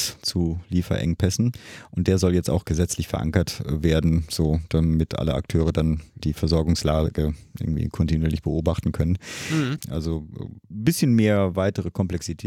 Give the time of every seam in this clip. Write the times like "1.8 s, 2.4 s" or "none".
9.8 s